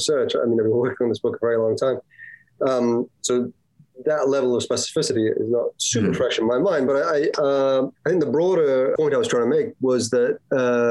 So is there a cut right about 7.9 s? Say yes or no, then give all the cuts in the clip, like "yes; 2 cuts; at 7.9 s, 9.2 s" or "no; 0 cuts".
yes; 2 cuts; at 7.9 s, 9.0 s